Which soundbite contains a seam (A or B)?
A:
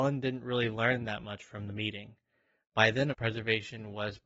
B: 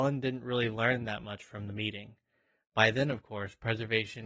A